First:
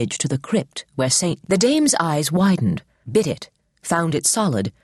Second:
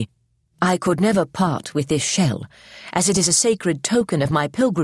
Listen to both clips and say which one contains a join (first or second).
first